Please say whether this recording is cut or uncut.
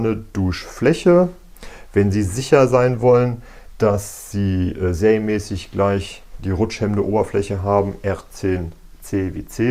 cut